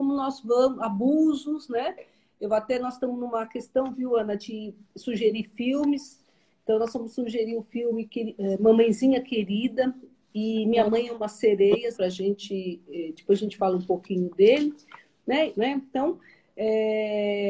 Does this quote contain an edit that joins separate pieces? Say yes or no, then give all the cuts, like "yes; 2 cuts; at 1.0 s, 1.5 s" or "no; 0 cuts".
yes; 2 cuts; at 11.9 s, 15.5 s